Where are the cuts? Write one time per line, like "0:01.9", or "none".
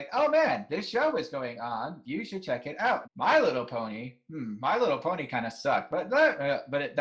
0:03.0

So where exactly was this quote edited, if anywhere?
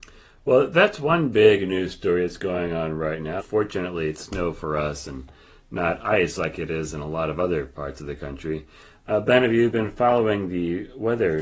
0:03.4

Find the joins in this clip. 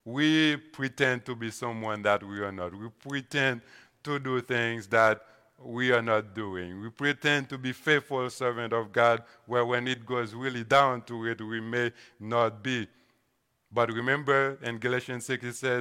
none

